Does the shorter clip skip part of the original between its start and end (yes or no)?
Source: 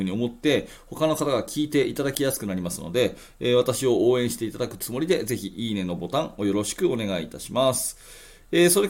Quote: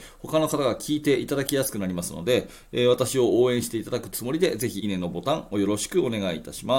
yes